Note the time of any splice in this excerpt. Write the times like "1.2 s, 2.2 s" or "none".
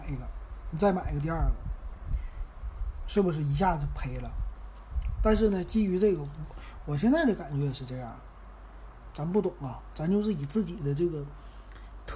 9.1 s